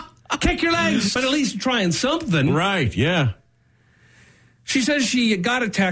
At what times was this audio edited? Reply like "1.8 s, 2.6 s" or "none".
1.2 s